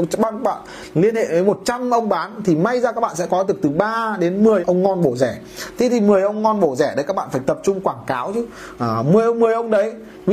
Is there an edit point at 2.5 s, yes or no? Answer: no